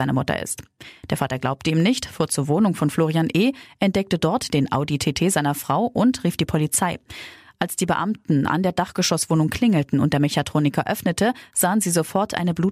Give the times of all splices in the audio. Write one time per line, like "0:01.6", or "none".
none